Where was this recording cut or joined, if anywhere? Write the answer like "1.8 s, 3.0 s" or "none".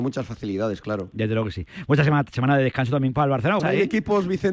3.6 s